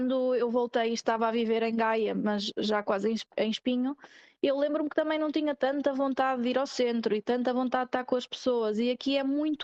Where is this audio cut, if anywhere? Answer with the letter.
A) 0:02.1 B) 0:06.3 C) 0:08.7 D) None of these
D